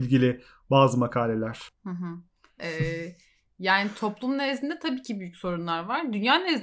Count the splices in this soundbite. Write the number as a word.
one